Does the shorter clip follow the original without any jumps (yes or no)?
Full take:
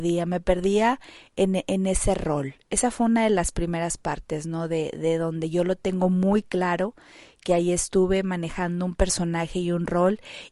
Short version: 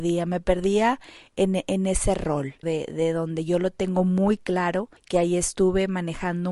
no